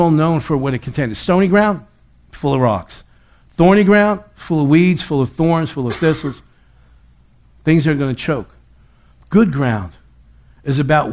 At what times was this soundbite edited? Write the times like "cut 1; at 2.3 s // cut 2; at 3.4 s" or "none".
none